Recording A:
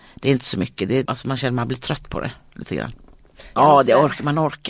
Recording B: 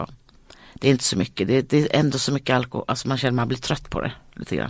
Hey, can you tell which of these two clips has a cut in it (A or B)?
A